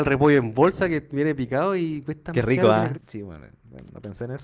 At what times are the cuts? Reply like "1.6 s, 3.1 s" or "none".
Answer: 2.9 s

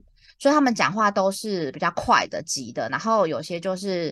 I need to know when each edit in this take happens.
none

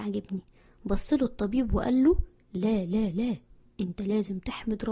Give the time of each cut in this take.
none

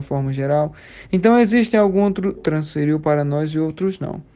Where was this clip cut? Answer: 2.4 s

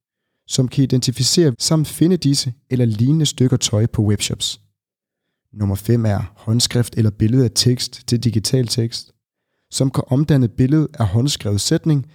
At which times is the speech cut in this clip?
1.5 s

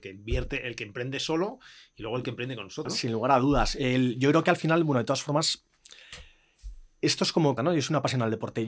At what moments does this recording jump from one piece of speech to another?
2.8 s, 7.6 s

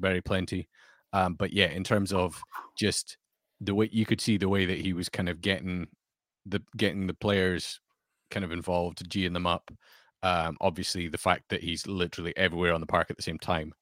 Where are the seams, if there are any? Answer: none

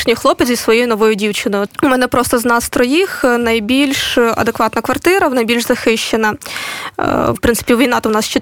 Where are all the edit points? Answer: 1.7 s, 7.3 s

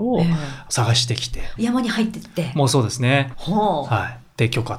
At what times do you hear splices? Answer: 1.6 s, 3.3 s

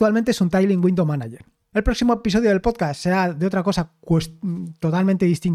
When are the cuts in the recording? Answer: 1.7 s

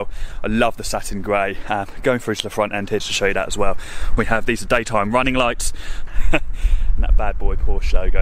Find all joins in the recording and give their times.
3.0 s, 4.2 s, 6.1 s

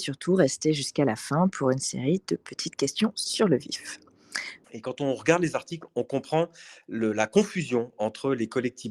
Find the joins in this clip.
4.6 s

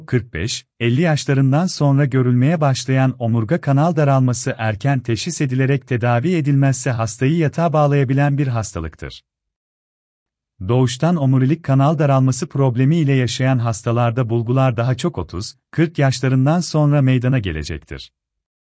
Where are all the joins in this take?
none

